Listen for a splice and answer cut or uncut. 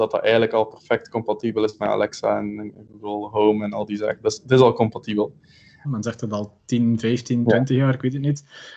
cut